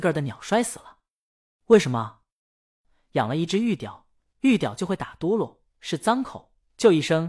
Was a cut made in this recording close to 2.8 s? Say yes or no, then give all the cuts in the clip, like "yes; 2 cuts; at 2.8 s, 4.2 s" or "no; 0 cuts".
yes; 1 cut; at 2.8 s